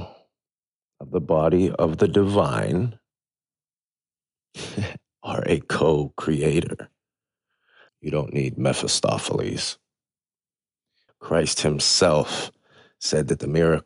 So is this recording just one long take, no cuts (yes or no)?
no